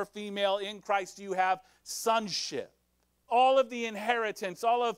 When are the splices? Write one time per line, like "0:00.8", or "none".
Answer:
0:03.3